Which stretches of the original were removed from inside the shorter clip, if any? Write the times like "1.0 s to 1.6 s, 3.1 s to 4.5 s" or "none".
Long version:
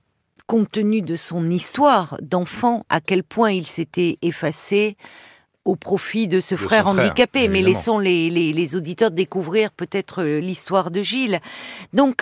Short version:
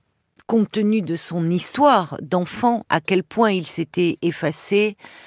none

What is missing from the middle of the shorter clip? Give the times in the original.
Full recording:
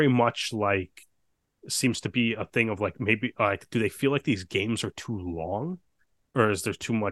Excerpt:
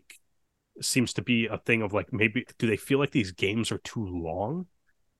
3.3 s to 3.6 s

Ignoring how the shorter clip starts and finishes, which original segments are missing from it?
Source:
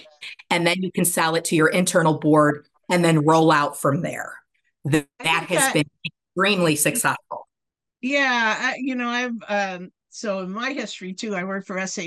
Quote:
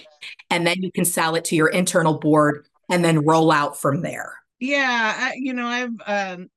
4.5 s to 7.9 s

